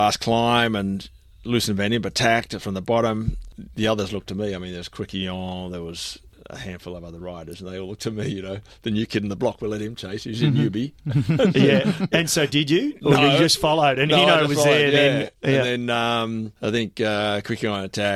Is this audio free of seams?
no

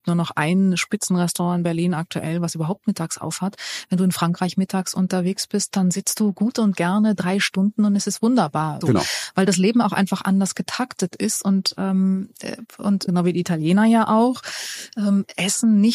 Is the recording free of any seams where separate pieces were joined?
no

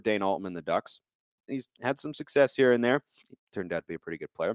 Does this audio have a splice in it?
yes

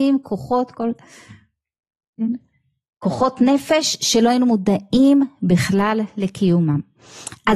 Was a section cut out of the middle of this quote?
no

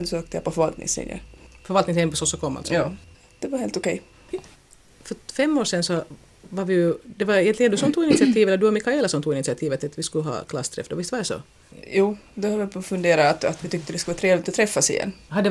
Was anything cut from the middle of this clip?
yes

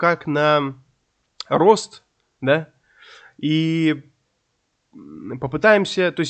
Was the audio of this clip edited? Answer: no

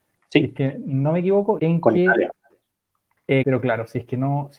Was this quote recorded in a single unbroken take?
no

